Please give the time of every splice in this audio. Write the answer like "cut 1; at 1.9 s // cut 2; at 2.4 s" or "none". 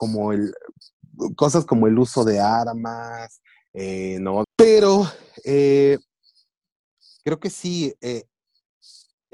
cut 1; at 4.4 s